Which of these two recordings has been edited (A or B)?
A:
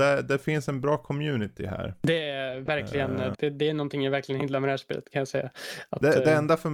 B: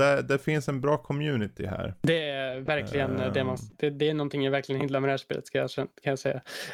A